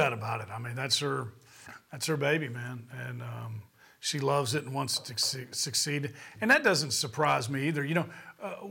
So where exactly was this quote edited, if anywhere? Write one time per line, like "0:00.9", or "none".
none